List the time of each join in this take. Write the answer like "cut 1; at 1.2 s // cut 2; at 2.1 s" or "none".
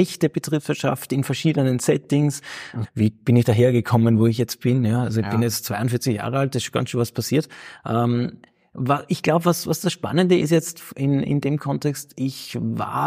cut 1; at 2.8 s